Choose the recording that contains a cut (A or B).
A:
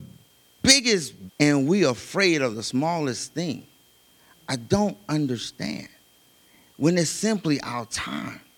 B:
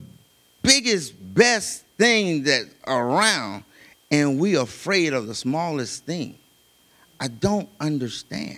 A